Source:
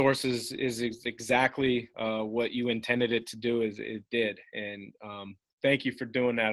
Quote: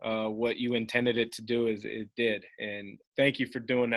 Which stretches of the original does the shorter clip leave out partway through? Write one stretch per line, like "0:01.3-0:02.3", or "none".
0:05.0-0:05.5